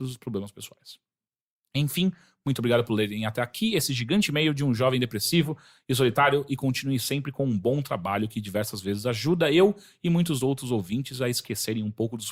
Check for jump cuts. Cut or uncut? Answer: uncut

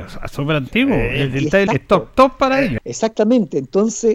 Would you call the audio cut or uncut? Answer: cut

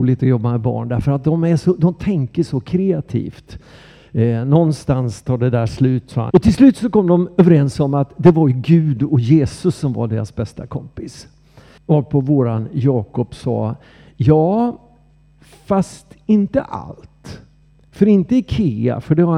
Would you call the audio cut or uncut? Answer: cut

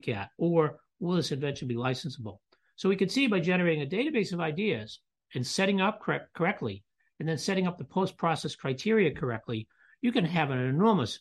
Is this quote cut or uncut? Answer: uncut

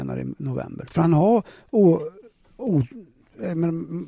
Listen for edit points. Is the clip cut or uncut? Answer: cut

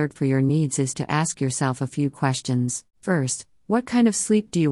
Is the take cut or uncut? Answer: cut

